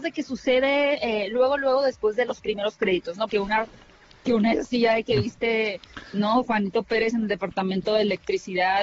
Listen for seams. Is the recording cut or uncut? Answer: cut